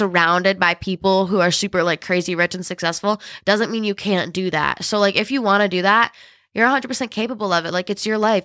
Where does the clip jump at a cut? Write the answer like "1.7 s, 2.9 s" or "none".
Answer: none

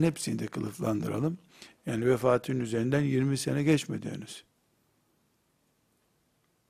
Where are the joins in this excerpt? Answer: 1.8 s

